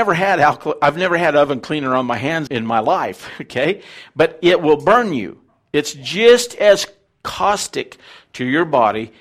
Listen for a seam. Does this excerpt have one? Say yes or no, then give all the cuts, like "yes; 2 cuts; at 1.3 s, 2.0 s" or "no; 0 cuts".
yes; 1 cut; at 2.5 s